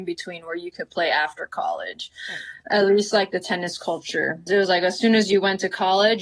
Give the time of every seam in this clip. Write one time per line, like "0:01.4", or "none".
0:04.5

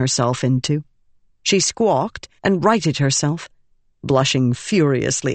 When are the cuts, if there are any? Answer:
0:02.4

